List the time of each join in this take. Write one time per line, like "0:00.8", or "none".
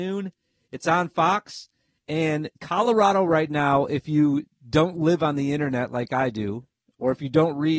none

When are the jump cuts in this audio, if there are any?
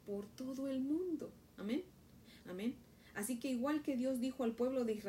0:02.4

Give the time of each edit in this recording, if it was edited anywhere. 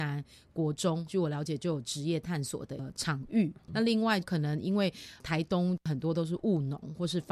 0:03.6

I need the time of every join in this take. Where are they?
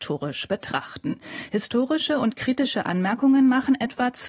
none

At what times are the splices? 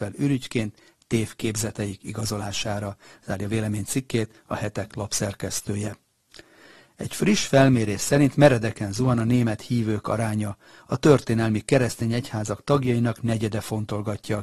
none

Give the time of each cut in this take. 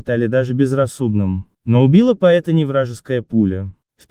none

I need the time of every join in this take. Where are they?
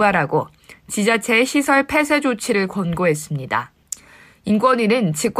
none

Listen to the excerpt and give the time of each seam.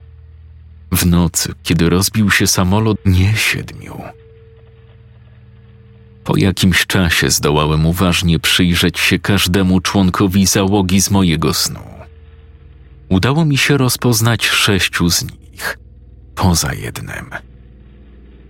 0:03.0

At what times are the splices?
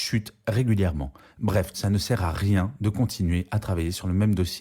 0:01.7

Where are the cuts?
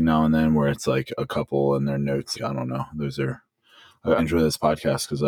0:02.3
0:04.2

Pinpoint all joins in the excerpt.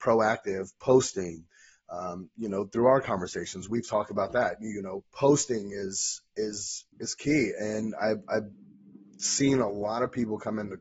0:06.9

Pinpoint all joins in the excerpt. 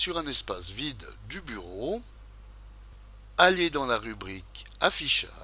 none

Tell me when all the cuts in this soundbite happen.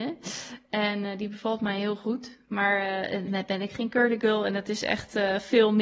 0:03.3

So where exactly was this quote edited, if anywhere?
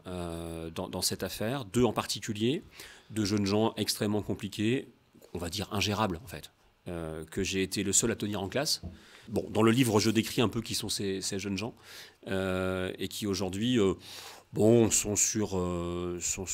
none

